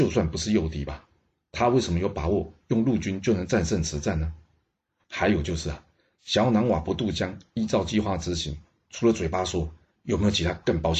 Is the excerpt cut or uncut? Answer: uncut